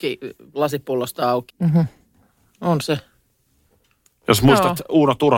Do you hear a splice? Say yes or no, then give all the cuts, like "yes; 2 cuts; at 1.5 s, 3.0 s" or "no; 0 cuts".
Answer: yes; 1 cut; at 1.5 s